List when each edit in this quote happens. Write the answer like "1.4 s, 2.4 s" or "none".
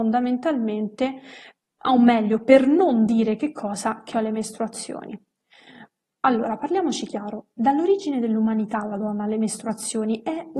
6.0 s